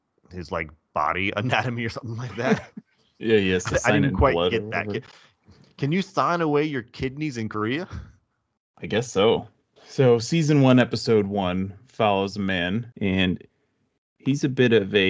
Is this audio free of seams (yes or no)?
no